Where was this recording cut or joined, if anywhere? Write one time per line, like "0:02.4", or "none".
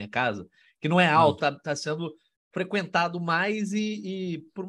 0:01.4